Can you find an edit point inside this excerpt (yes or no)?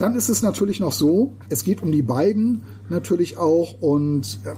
no